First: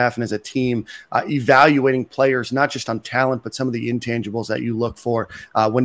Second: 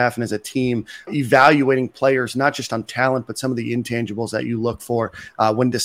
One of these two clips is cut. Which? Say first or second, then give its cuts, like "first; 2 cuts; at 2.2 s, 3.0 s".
second; 1 cut; at 1.1 s